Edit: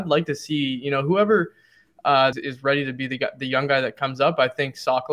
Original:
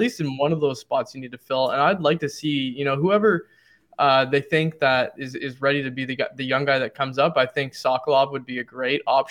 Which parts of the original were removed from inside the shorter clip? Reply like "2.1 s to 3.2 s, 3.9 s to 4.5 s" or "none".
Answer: 4.3 s to 5.3 s